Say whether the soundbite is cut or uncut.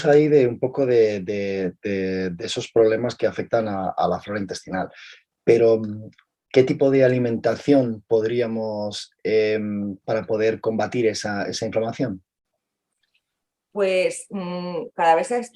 cut